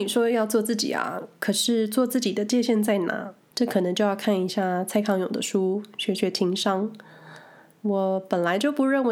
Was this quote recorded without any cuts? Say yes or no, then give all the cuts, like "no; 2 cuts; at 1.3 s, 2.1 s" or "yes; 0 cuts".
no; 2 cuts; at 3.5 s, 7.8 s